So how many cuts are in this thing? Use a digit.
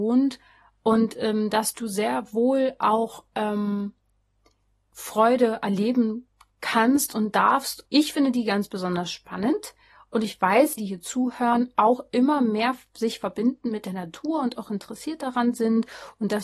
2